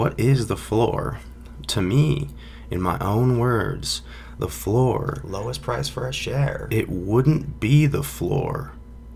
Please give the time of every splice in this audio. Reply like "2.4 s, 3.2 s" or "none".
none